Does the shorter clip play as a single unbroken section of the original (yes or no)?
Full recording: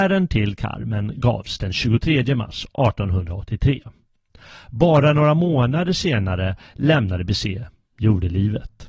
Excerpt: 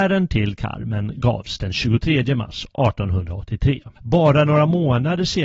no